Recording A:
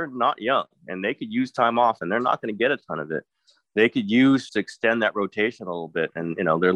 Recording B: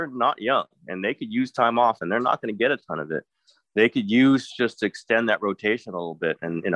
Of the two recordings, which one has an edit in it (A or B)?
A